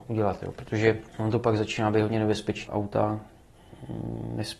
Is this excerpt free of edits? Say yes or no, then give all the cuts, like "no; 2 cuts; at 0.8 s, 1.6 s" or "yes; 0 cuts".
no; 2 cuts; at 1.1 s, 2.7 s